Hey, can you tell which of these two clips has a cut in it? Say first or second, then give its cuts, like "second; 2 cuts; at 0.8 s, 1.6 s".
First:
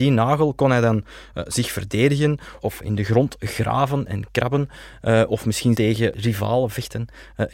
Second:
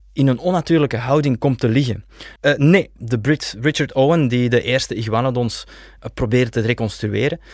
second; 1 cut; at 2.4 s